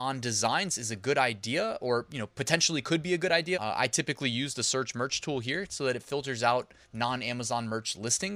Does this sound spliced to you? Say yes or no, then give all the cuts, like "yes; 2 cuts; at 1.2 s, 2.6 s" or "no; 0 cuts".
yes; 2 cuts; at 3.5 s, 6.8 s